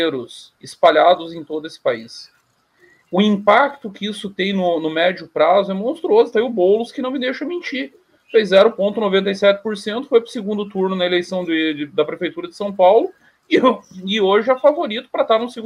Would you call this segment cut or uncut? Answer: uncut